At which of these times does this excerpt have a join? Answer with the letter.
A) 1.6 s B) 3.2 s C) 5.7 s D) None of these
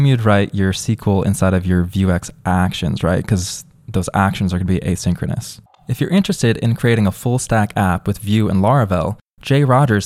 C